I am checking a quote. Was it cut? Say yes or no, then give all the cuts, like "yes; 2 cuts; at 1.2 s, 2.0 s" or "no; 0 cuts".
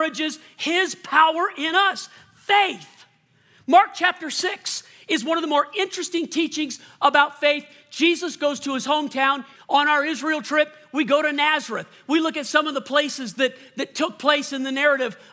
yes; 1 cut; at 9.6 s